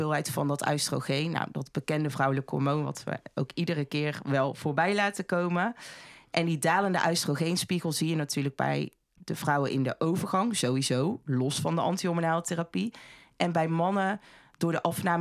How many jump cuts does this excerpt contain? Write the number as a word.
zero